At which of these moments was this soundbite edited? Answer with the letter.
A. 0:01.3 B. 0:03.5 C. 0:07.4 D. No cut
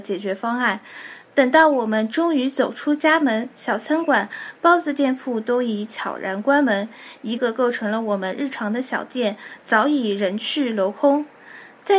C